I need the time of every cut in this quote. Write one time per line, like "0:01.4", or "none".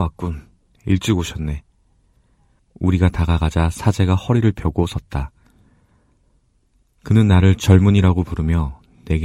0:02.6